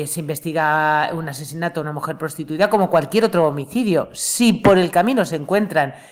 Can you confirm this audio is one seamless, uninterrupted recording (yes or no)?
yes